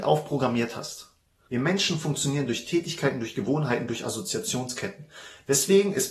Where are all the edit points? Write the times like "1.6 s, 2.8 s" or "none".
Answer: 1.5 s